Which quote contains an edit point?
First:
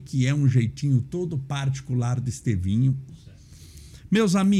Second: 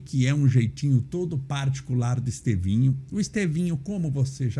first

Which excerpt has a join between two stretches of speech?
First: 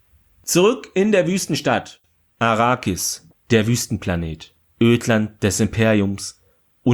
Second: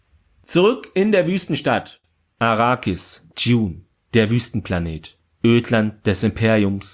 first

